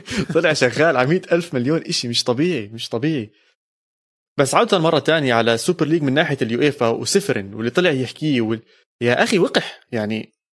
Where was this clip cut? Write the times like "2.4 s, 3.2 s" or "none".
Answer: 4.3 s